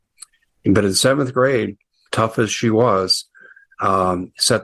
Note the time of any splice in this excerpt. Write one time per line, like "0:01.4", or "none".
0:02.1